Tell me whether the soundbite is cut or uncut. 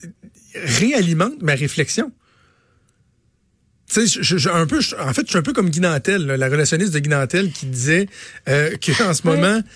uncut